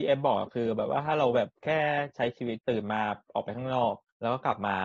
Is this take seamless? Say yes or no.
no